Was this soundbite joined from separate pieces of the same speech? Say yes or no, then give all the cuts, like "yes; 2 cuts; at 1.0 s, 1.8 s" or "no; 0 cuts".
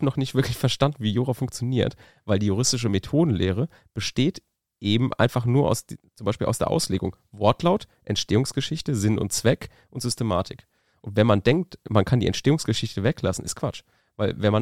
no; 0 cuts